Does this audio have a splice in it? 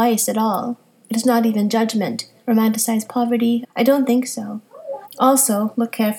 yes; 3 cuts; at 2.4 s, 3.6 s, 5.0 s

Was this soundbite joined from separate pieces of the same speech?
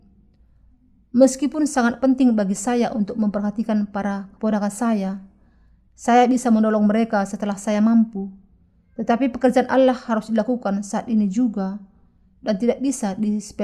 no; 0 cuts

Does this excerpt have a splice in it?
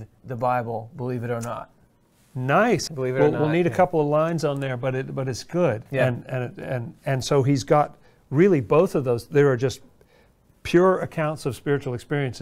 yes; 2 cuts; at 2.9 s, 5.9 s

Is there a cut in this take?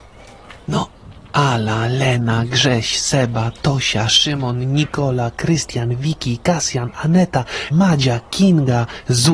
yes; 1 cut; at 7.7 s

